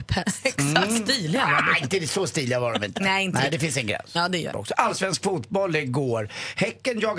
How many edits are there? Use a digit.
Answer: 1